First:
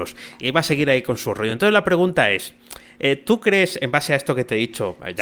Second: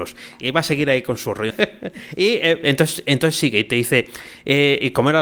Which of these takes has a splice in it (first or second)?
second